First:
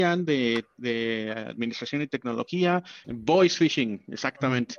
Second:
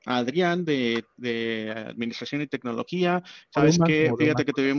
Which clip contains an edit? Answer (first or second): first